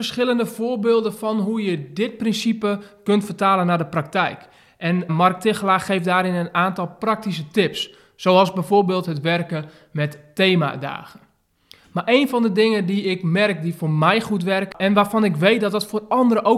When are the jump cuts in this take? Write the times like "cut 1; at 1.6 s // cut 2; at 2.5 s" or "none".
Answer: cut 1; at 5.1 s